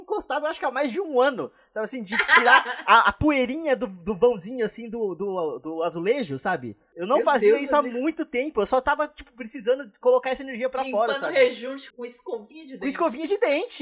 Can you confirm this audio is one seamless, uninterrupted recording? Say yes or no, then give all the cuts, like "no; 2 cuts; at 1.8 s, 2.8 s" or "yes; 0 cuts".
no; 1 cut; at 11.9 s